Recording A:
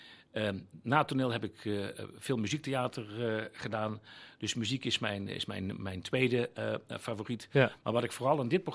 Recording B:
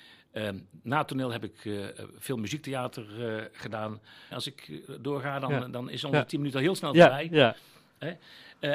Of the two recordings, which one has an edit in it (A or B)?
B